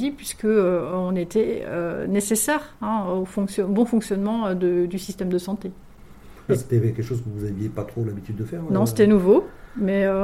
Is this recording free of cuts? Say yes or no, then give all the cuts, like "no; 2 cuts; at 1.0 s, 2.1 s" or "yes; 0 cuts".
no; 1 cut; at 6.5 s